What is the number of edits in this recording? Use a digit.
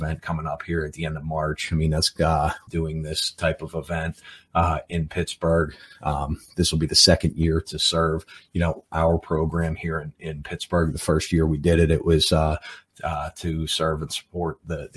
1